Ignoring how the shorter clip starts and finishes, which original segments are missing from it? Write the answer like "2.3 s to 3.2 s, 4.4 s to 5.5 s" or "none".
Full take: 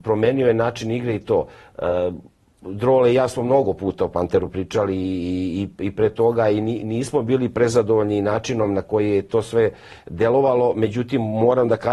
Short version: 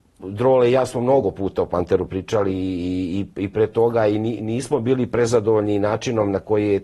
none